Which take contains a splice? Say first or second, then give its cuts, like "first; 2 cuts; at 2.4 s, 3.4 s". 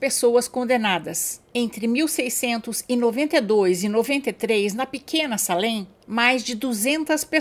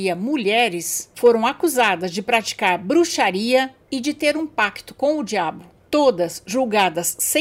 first; 1 cut; at 1.5 s